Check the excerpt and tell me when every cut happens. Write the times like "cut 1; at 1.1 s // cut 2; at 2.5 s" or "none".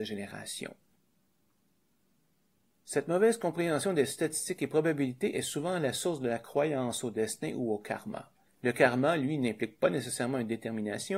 cut 1; at 8.5 s